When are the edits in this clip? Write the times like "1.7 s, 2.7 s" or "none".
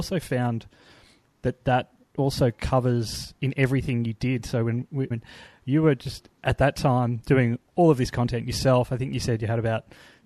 5.1 s, 6.4 s